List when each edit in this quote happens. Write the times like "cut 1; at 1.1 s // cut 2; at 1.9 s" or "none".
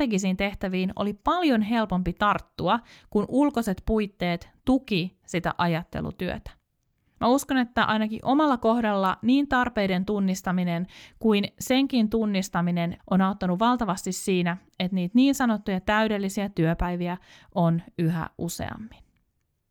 cut 1; at 7.1 s // cut 2; at 13.0 s